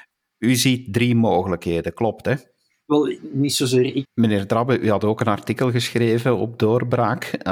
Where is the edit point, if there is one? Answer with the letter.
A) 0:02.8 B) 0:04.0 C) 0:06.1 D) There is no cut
B